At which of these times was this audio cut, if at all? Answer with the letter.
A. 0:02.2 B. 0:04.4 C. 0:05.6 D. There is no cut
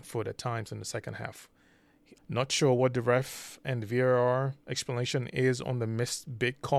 A